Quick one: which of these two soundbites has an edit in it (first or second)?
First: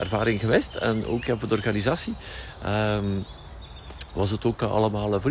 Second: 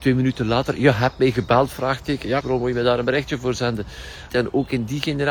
second